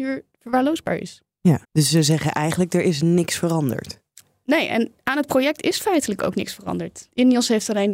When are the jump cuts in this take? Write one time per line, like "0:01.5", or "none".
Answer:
0:01.6